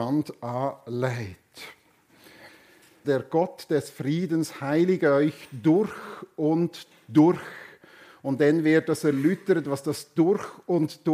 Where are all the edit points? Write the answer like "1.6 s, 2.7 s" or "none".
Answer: 3.0 s